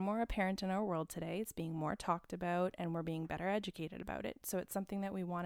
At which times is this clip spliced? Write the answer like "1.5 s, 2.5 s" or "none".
none